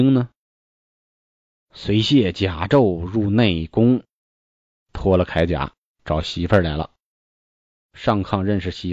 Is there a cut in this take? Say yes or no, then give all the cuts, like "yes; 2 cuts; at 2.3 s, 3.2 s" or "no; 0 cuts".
no; 0 cuts